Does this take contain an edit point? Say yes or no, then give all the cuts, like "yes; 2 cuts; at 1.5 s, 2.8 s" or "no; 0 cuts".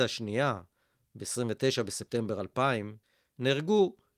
no; 0 cuts